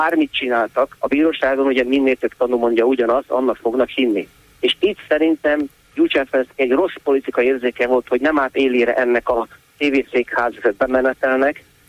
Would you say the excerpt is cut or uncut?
cut